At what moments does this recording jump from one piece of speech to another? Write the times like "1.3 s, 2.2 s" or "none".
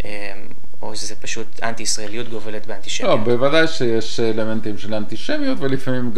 none